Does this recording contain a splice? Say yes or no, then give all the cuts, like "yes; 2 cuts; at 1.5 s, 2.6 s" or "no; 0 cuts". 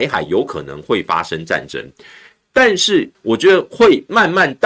yes; 1 cut; at 3.1 s